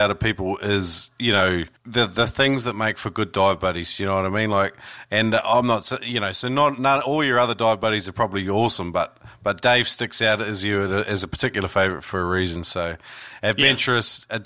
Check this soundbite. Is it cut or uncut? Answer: cut